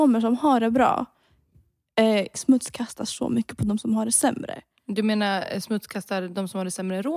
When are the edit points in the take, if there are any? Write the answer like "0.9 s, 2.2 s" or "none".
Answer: 2.3 s